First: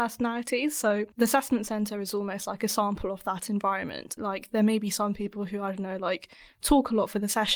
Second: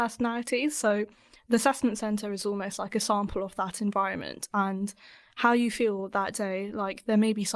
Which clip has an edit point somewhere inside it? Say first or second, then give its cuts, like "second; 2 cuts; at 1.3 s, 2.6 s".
first; 2 cuts; at 1.1 s, 4.2 s